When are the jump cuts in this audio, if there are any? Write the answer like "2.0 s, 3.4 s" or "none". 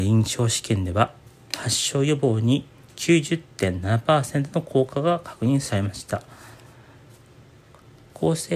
none